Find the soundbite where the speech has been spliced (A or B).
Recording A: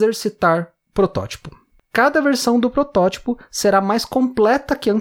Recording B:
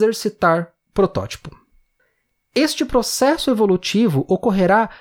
A